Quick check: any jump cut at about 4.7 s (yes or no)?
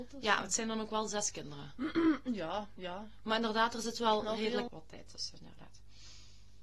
yes